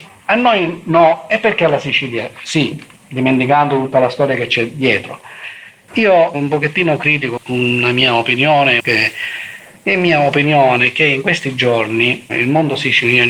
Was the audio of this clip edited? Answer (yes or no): yes